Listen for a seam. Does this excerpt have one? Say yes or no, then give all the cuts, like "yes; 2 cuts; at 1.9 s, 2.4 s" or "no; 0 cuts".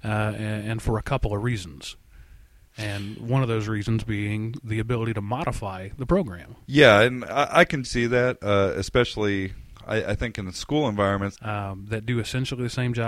yes; 3 cuts; at 6.6 s, 7.8 s, 11.3 s